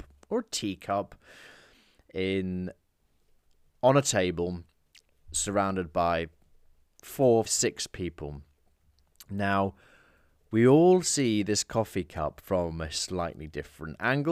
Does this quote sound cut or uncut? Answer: cut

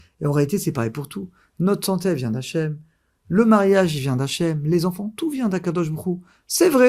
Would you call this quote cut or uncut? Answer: uncut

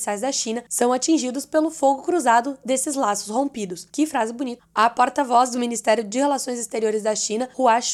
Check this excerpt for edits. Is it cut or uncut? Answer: cut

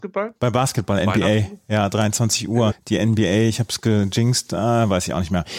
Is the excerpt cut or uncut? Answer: cut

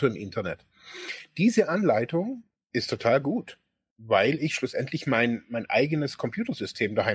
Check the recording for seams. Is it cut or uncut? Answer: uncut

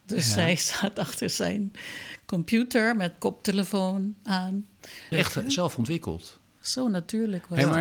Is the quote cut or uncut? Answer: cut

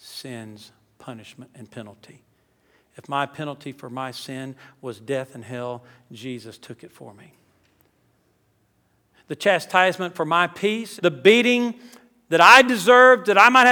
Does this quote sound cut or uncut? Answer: cut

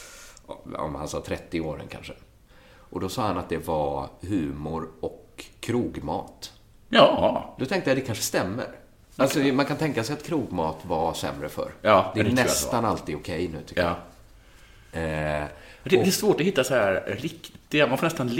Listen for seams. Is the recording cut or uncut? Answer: uncut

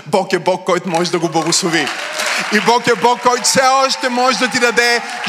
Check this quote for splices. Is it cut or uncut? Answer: cut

